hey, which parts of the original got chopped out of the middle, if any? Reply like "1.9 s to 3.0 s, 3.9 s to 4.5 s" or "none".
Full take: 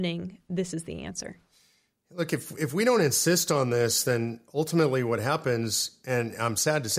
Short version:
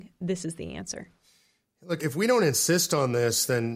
2.3 s to 2.6 s